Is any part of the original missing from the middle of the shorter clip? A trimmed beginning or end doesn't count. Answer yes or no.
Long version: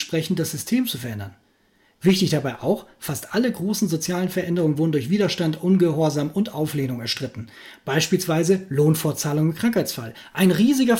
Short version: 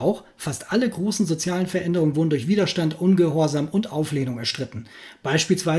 no